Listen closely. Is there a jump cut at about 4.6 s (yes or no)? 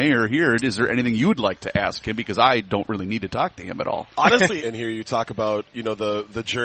yes